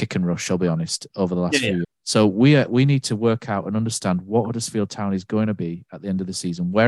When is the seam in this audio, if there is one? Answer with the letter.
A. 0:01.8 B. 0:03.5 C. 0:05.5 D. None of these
A